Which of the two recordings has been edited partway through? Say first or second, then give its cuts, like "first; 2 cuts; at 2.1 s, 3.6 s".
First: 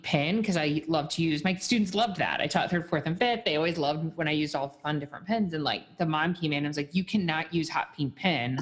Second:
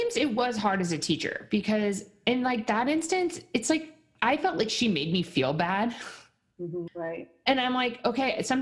second; 1 cut; at 6.9 s